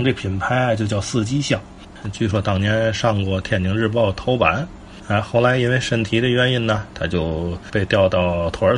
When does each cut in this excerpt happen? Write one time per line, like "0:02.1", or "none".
0:02.0